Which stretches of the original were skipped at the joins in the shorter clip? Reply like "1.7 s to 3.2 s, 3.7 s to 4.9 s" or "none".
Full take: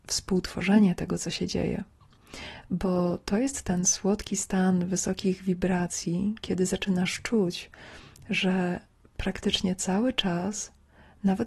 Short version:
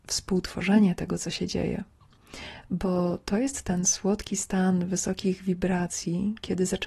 none